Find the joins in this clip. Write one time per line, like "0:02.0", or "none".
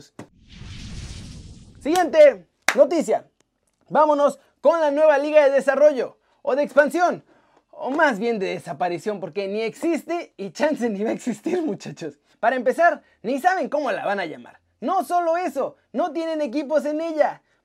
0:12.3